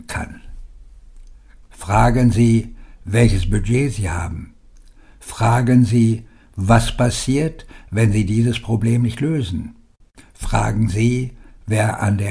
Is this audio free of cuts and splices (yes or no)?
no